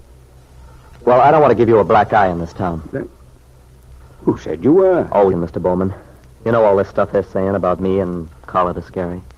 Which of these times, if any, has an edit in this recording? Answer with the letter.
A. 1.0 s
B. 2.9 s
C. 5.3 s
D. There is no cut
C